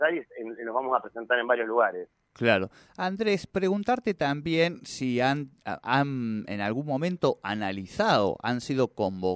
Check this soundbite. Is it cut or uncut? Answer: uncut